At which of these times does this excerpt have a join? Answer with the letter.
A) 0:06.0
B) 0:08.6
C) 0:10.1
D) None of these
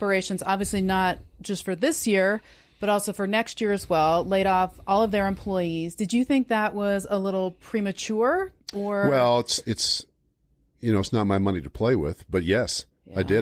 B